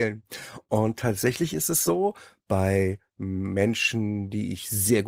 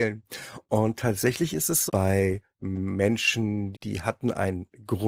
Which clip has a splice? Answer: second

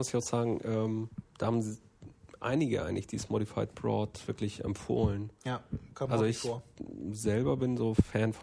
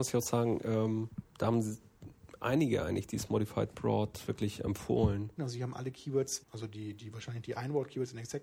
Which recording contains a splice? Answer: second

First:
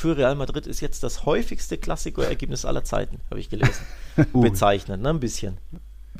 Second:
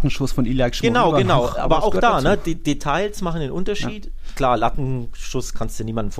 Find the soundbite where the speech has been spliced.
first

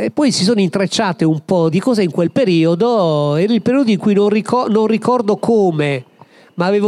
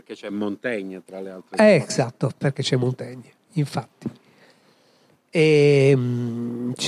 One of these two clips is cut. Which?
first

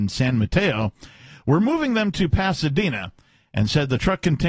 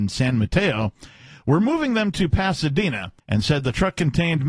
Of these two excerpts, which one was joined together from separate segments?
second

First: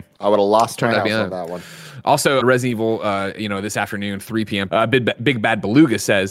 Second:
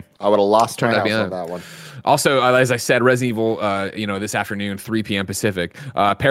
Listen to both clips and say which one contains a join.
first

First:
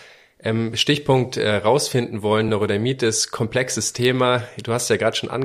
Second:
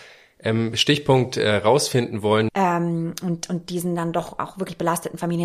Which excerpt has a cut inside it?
second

